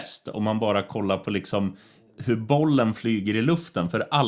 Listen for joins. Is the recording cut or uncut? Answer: uncut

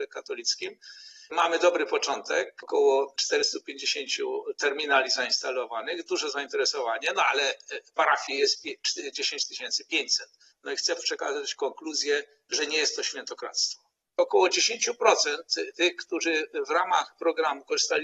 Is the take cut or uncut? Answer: cut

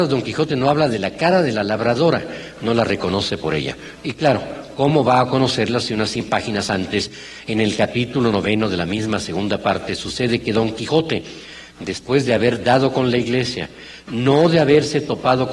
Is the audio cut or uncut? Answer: uncut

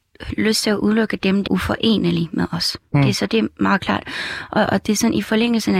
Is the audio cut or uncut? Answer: cut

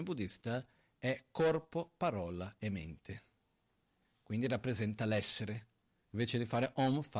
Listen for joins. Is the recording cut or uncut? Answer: cut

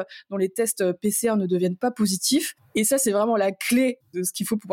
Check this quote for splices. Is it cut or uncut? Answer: uncut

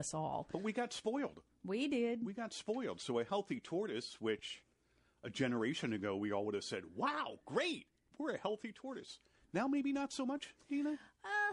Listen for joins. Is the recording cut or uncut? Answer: uncut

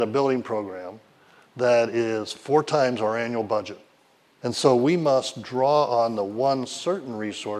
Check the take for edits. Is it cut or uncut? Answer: cut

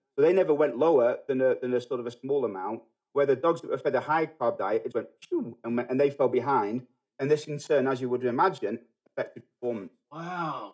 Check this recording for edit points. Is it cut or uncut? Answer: cut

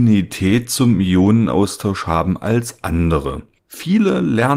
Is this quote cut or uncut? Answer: cut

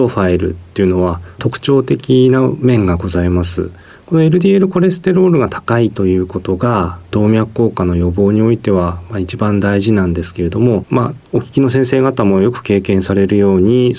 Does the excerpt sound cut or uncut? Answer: uncut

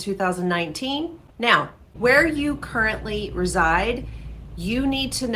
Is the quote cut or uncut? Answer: cut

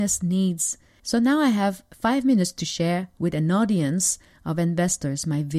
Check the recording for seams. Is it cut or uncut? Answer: cut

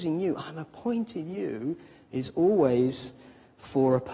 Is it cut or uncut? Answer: uncut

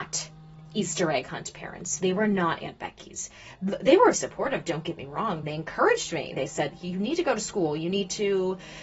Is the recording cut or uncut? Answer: cut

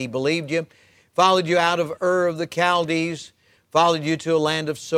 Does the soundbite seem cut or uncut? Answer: uncut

